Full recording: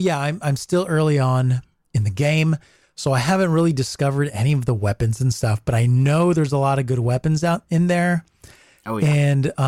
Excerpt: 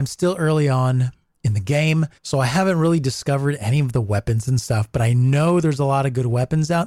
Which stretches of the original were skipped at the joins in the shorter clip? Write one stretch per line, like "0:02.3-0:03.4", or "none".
0:02.7-0:02.9